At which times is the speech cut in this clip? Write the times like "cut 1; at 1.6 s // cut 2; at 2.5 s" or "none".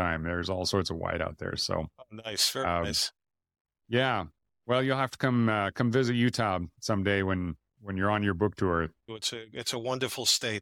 cut 1; at 9.1 s